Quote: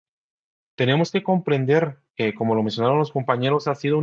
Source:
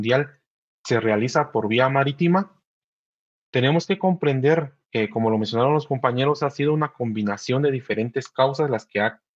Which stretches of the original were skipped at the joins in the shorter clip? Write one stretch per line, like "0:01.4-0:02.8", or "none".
none